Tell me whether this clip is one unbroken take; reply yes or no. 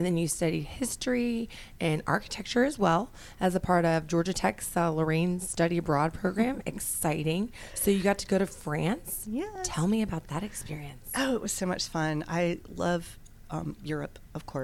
yes